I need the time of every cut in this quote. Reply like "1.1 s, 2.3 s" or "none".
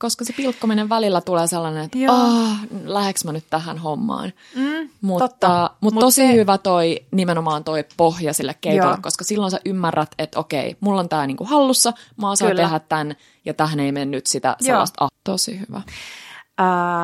15.1 s